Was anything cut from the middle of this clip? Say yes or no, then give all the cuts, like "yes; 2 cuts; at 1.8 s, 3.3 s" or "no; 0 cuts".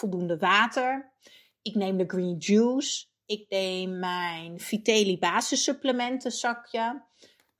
no; 0 cuts